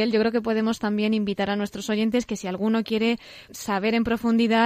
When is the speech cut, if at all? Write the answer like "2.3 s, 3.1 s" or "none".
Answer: 3.5 s